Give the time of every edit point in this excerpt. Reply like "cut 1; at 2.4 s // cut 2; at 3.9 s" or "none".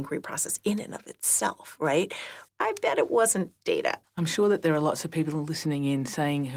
cut 1; at 2.5 s // cut 2; at 4.0 s